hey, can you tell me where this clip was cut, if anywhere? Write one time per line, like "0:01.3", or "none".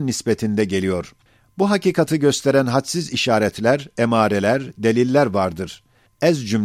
none